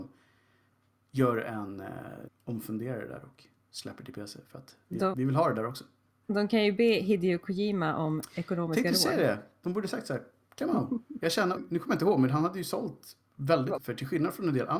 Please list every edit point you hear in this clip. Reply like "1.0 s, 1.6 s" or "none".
2.3 s, 11.6 s, 13.8 s